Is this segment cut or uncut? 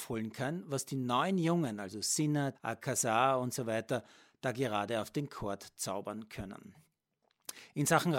cut